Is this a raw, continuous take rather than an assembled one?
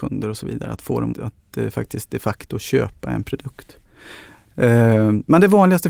no; 1 cut; at 1.1 s

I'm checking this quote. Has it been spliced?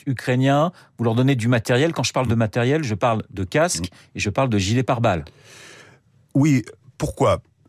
no; 0 cuts

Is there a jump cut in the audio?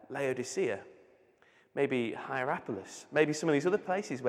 no; 0 cuts

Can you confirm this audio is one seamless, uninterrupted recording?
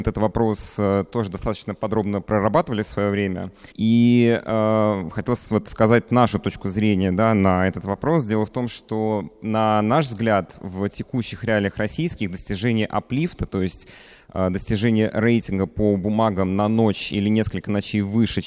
no; 1 cut; at 3.7 s

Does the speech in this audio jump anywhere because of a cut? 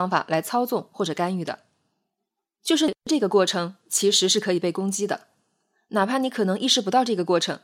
no; 0 cuts

